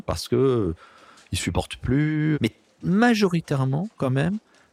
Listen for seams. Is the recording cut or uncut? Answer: cut